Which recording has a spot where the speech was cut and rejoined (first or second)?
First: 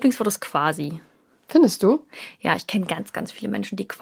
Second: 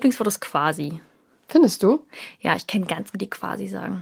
second